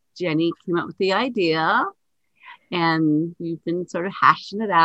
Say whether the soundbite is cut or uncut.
uncut